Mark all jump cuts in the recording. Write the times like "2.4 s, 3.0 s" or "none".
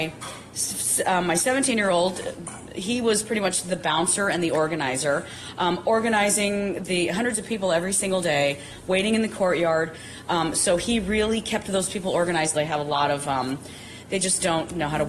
12.6 s